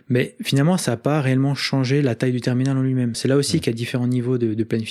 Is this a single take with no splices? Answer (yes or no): yes